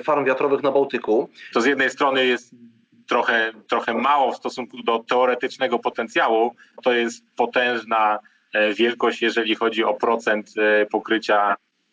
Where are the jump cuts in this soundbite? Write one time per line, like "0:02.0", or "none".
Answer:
0:01.5
0:06.8